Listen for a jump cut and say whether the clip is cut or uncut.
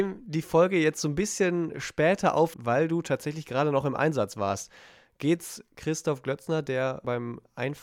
cut